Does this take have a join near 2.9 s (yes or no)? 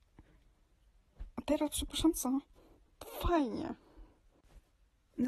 yes